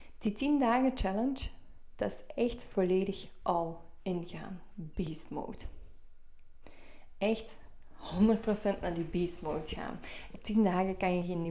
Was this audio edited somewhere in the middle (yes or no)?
yes